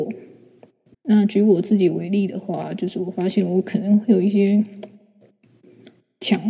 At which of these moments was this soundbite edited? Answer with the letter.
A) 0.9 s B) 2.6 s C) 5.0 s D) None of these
A